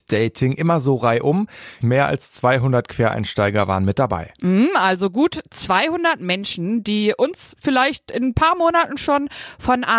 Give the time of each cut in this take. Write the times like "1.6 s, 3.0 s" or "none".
1.8 s